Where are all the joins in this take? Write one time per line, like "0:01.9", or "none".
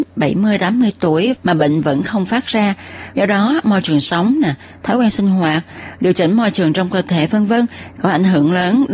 0:03.1